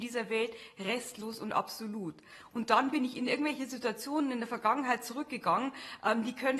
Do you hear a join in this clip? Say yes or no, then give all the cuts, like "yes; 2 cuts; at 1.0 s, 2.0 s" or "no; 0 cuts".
no; 0 cuts